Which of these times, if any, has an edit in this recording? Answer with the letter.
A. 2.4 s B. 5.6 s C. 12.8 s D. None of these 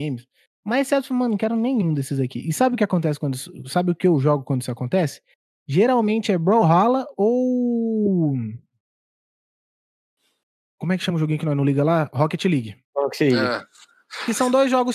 D